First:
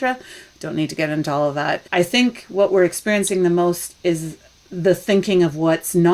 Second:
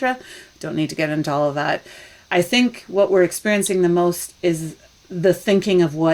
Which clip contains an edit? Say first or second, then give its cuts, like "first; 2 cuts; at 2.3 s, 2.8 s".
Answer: first; 1 cut; at 1.9 s